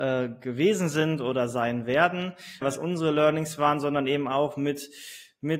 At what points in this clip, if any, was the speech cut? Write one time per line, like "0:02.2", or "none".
0:02.6